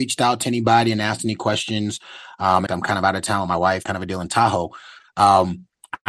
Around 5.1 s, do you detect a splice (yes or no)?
no